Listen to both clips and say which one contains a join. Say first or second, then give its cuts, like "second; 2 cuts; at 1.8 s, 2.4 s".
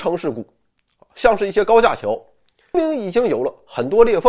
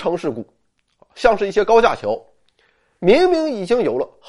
first; 1 cut; at 2.7 s